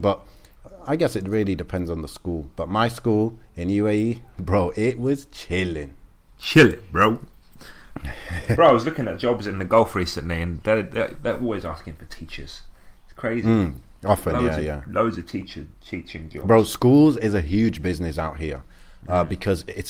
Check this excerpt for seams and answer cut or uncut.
uncut